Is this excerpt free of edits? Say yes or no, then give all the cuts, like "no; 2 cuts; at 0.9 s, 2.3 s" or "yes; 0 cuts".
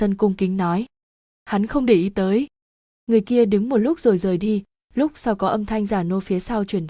yes; 0 cuts